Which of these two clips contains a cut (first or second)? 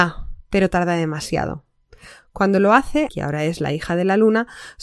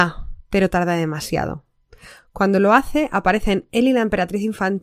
first